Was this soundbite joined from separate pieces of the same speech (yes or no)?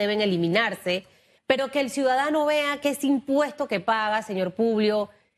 yes